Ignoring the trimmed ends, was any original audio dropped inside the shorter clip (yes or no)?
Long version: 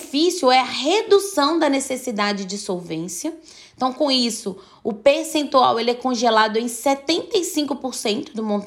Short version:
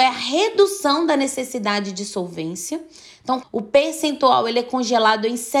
yes